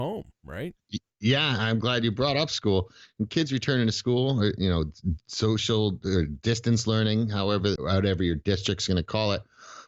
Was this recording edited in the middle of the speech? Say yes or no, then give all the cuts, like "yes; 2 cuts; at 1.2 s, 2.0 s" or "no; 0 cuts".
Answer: yes; 1 cut; at 7.8 s